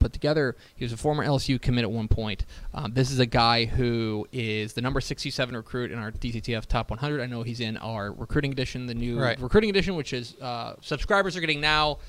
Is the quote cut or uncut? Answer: uncut